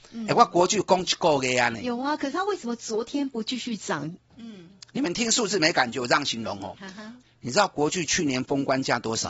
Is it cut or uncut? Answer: cut